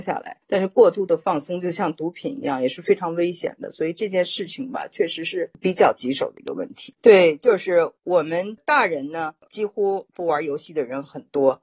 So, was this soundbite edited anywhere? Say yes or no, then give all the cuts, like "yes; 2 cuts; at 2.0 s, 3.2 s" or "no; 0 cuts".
no; 0 cuts